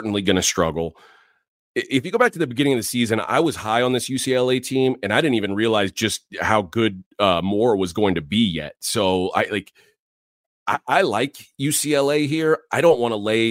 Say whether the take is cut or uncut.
uncut